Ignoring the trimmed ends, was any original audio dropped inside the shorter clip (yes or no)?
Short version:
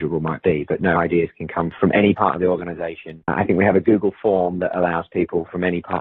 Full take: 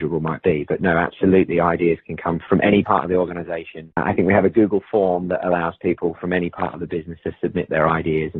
yes